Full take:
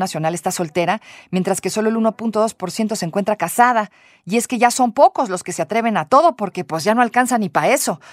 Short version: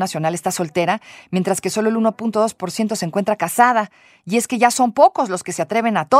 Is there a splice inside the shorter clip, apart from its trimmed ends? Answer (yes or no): no